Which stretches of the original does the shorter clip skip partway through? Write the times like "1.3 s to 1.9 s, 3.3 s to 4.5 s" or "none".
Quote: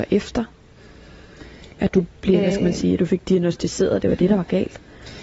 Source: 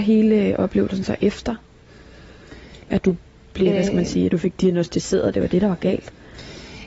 3.3 s to 3.5 s